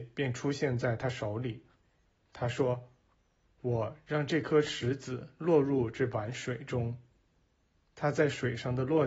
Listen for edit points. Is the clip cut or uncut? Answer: uncut